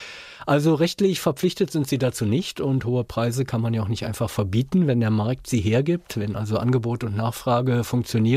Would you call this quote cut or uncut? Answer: uncut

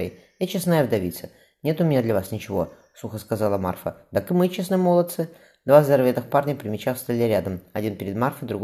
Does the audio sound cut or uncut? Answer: uncut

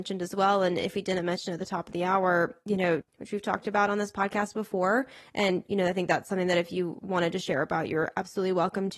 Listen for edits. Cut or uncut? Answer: cut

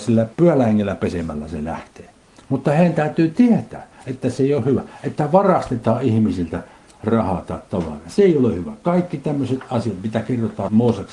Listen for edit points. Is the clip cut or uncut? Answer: uncut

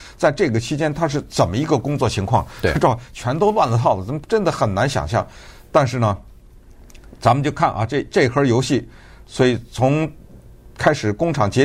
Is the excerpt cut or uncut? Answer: uncut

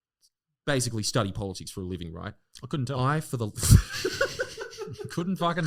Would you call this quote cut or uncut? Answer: uncut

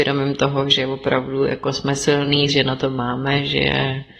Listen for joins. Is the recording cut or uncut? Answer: cut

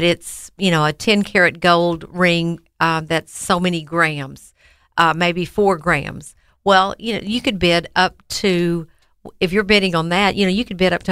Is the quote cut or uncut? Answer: uncut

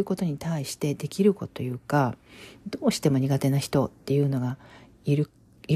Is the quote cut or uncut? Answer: cut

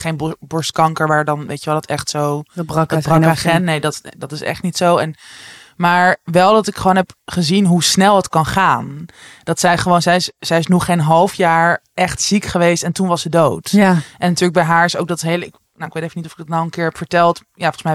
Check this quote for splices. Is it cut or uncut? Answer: uncut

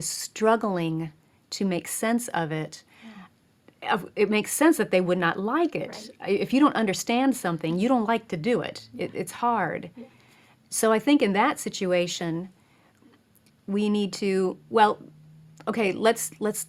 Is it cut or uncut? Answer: uncut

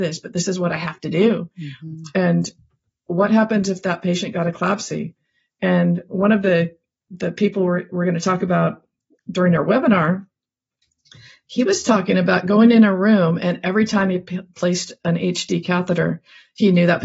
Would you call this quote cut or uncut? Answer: uncut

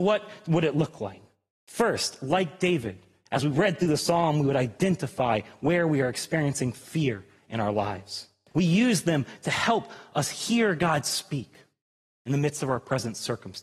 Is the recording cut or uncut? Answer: cut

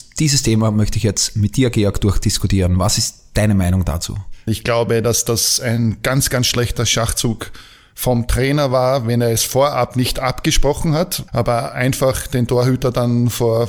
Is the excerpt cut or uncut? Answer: cut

